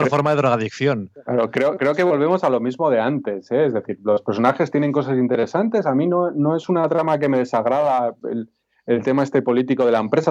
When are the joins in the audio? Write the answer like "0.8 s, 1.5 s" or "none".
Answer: none